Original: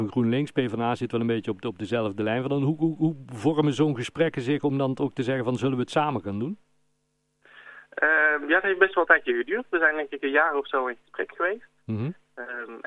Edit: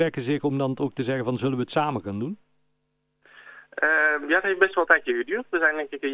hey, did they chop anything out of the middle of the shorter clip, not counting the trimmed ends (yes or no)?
no